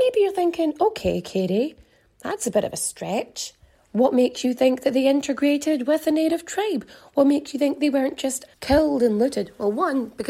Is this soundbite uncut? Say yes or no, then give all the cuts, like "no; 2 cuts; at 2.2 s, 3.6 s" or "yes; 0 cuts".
no; 1 cut; at 8.5 s